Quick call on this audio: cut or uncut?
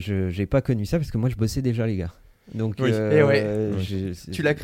uncut